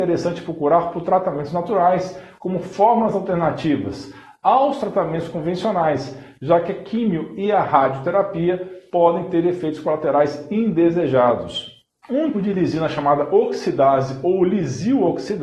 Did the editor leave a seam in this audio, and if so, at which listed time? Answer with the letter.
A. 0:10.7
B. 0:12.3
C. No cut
B